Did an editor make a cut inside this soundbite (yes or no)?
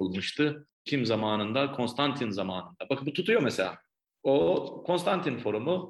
no